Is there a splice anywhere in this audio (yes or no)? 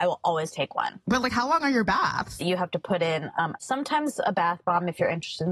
yes